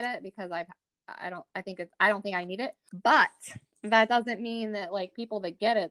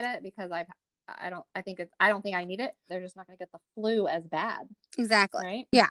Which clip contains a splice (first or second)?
second